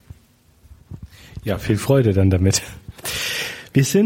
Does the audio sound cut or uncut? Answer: uncut